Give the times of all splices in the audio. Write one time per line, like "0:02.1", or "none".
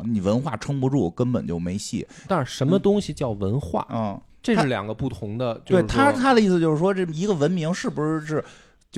0:02.3